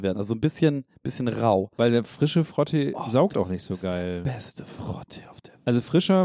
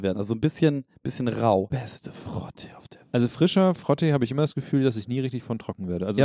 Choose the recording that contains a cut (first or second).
second